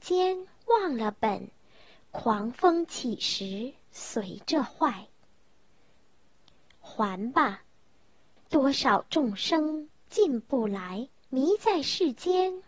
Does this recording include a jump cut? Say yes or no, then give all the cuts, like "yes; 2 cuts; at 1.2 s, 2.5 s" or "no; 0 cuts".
yes; 2 cuts; at 8.4 s, 11.2 s